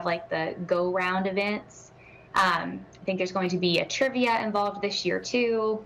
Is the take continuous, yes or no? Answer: yes